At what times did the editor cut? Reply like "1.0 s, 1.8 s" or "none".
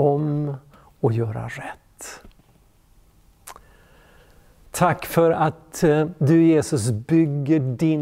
4.7 s